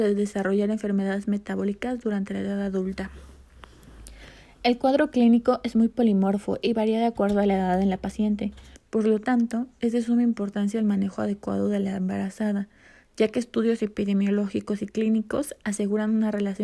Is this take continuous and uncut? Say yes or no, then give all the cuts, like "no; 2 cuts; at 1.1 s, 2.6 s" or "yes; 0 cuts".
no; 1 cut; at 8.8 s